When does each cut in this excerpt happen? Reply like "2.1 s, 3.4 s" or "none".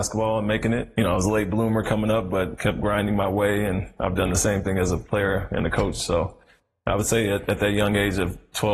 none